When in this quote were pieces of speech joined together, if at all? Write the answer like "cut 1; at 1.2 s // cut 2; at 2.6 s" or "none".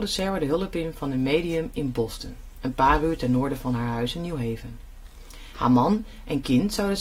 cut 1; at 5.5 s